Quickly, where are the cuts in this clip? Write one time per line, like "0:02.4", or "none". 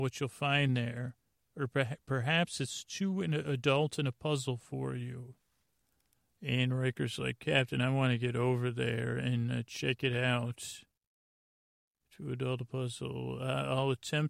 none